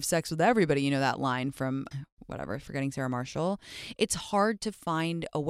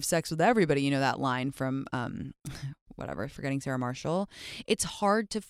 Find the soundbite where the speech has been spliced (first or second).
first